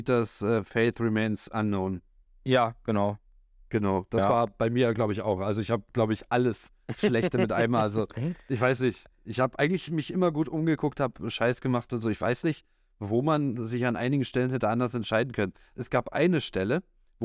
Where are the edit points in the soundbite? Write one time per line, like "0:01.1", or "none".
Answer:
none